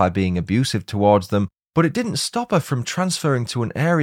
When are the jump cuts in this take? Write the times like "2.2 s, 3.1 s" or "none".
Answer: none